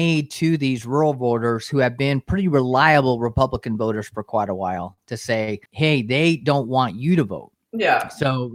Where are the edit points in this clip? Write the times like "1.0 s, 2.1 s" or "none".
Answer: 5.7 s, 7.6 s